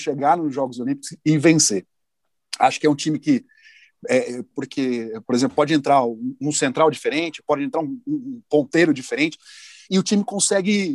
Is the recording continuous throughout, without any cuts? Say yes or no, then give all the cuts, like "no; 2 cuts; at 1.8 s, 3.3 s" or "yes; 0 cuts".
no; 1 cut; at 4.5 s